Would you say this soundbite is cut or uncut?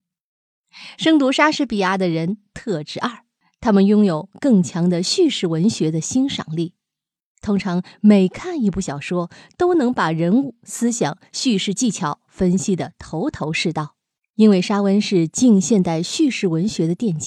uncut